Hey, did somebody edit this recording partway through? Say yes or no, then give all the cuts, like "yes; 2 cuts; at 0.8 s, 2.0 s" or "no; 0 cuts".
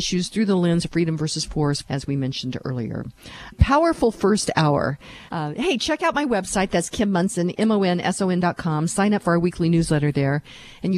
yes; 3 cuts; at 1.8 s, 3.5 s, 5.3 s